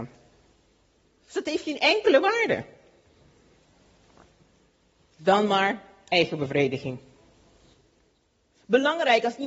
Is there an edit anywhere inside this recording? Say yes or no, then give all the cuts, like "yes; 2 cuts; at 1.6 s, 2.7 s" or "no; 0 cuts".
no; 0 cuts